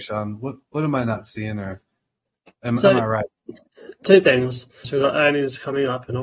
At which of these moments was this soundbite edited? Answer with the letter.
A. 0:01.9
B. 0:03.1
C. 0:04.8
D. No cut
C